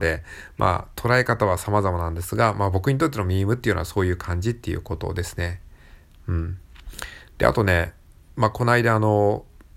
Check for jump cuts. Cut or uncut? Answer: uncut